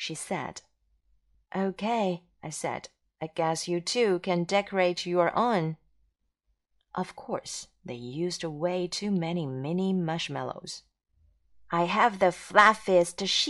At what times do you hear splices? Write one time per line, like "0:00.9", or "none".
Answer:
0:01.3